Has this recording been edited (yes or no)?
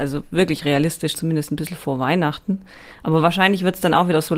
yes